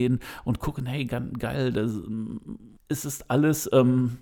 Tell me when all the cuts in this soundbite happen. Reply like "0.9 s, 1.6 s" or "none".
2.8 s